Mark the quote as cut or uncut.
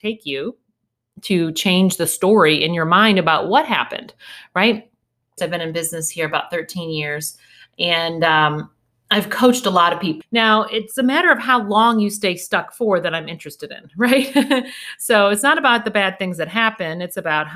cut